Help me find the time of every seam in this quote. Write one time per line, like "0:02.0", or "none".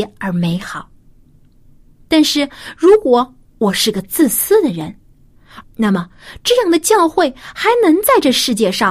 0:05.6